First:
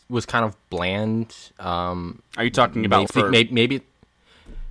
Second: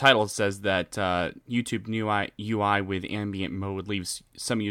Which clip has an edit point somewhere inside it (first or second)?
first